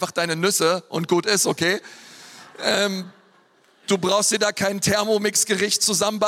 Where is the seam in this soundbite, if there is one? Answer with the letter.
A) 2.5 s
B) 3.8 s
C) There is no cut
C